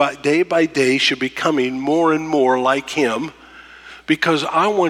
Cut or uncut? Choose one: uncut